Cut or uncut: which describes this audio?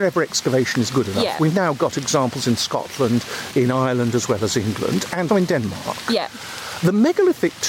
cut